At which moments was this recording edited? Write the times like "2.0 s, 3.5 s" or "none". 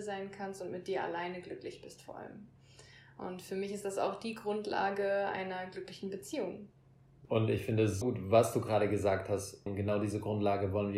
8.0 s, 9.7 s